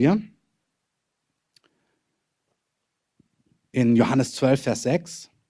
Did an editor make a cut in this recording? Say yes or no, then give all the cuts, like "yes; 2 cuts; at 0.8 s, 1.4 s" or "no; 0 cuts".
no; 0 cuts